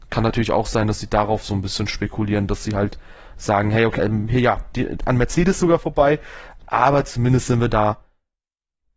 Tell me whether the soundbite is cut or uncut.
cut